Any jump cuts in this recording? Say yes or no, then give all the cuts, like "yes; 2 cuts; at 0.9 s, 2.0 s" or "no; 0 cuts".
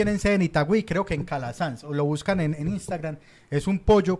no; 0 cuts